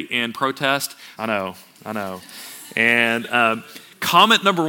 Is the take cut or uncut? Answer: cut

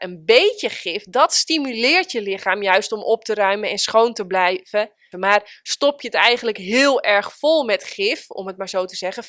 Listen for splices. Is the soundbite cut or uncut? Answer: cut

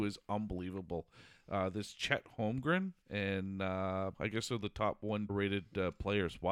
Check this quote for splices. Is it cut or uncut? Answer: cut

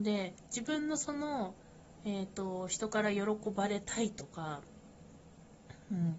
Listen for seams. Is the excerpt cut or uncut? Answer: uncut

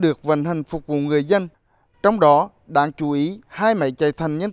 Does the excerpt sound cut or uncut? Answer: uncut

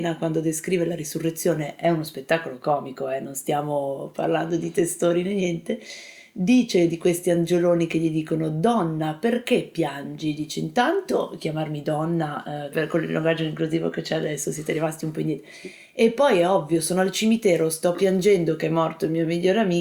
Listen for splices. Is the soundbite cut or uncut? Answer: cut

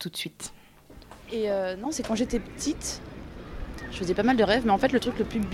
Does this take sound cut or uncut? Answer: cut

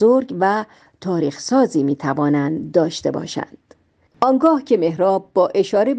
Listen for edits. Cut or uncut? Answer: cut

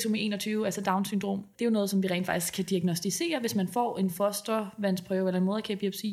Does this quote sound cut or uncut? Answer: uncut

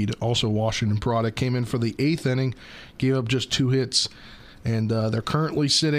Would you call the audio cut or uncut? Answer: uncut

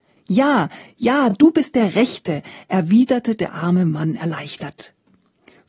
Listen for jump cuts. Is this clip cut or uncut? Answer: uncut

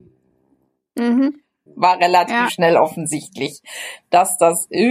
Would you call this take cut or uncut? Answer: cut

